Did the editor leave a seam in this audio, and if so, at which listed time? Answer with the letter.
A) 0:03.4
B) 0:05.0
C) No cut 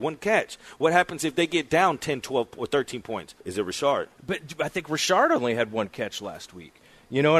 A